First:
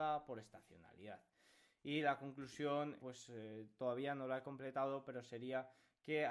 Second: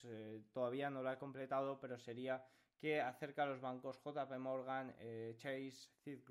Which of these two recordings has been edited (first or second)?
first